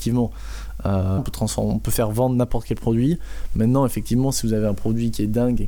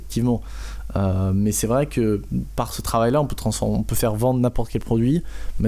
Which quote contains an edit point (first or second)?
first